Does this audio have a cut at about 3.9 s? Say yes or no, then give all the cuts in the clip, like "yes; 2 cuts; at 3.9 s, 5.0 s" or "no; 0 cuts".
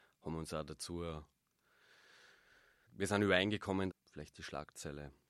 yes; 2 cuts; at 2.9 s, 3.9 s